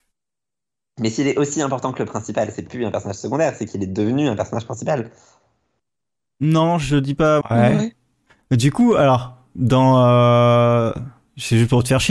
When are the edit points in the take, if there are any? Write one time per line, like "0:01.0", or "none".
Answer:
0:07.4